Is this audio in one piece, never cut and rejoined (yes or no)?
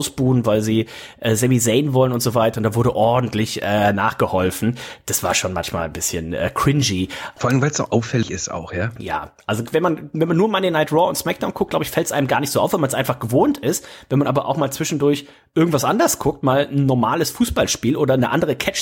no